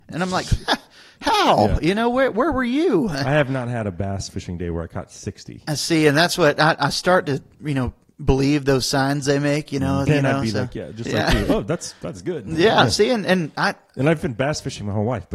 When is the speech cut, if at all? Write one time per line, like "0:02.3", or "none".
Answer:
0:10.1